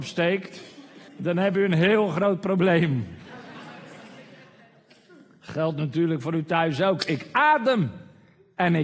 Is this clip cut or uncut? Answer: cut